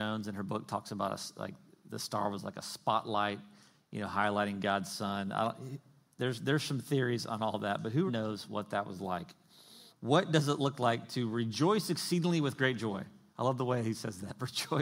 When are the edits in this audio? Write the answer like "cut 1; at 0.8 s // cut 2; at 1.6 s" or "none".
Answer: cut 1; at 8.1 s // cut 2; at 9.9 s